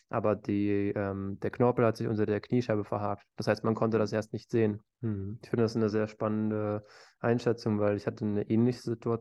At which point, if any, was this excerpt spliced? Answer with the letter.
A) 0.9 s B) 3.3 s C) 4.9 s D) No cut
C